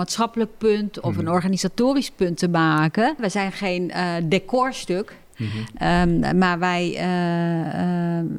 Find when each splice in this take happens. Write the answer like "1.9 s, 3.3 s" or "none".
3.2 s

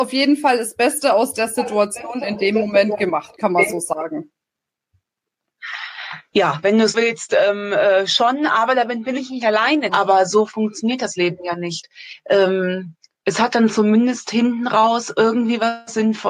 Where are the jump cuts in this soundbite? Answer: 6.9 s, 9.9 s

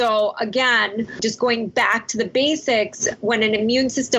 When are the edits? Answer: none

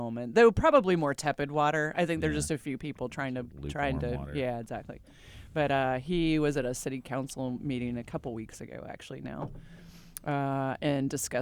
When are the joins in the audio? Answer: none

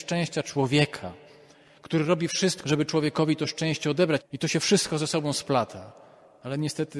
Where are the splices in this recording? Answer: 2.6 s, 4.2 s

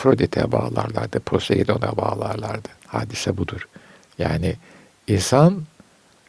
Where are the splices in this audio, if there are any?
2.8 s

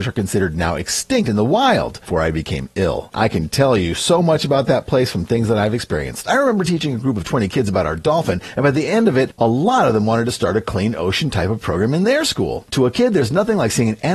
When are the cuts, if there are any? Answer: 2.1 s, 3.1 s, 6.3 s

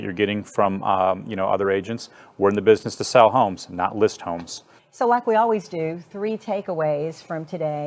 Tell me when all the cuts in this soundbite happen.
4.8 s

